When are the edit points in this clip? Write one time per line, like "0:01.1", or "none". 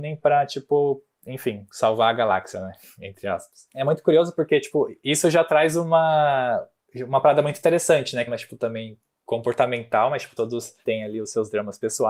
0:08.3
0:10.4